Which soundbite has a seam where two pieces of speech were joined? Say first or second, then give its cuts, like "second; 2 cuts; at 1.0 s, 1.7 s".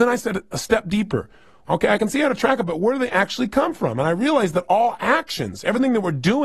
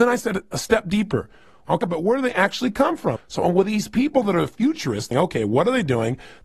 second; 3 cuts; at 1.8 s, 3.2 s, 5.1 s